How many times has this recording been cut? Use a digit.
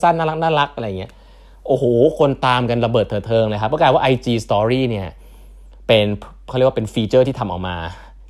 0